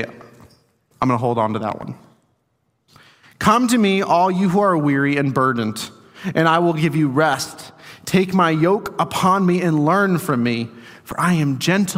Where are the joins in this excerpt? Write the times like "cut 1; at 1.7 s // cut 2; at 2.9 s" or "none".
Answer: none